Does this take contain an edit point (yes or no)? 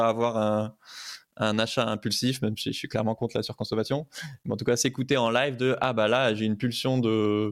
no